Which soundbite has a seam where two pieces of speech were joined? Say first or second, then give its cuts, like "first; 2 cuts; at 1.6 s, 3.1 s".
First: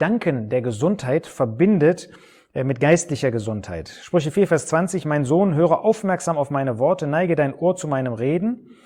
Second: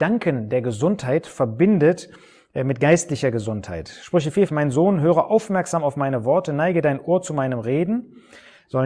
second; 1 cut; at 4.5 s